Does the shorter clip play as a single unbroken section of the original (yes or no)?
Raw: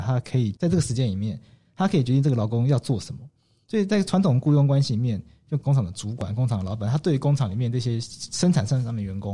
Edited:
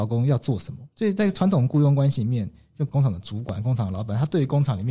no